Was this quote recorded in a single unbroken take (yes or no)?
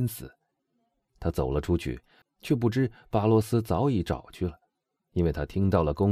no